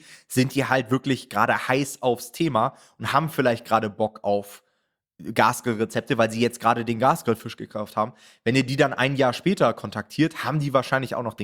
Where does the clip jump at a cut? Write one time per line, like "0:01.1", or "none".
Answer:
none